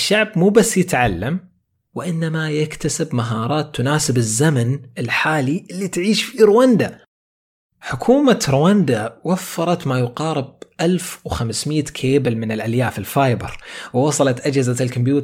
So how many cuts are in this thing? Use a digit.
0